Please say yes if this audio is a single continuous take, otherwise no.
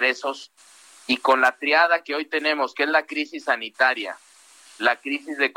yes